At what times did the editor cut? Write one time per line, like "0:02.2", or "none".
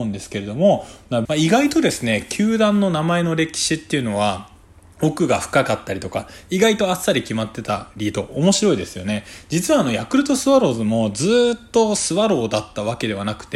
0:01.3